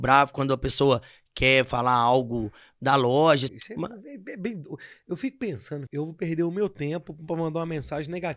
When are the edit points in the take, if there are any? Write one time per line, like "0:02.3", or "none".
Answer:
0:03.5
0:05.9